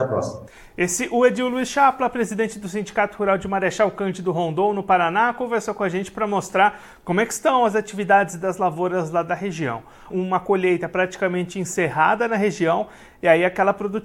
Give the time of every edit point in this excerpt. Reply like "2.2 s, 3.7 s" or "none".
10.1 s